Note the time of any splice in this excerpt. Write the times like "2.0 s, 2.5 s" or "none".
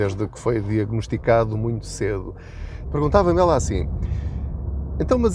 2.8 s